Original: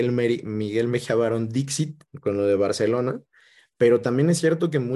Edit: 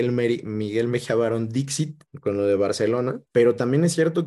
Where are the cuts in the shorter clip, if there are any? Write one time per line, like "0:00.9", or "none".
0:03.3